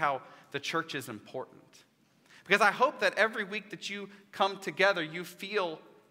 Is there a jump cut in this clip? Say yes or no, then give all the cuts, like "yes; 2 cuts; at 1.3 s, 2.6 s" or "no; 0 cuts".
no; 0 cuts